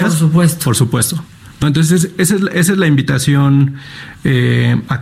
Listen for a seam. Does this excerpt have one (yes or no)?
no